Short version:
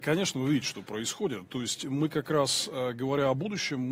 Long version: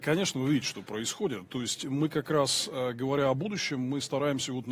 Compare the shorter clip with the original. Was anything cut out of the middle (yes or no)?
no